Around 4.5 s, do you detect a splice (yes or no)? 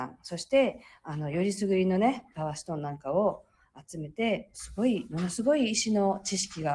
yes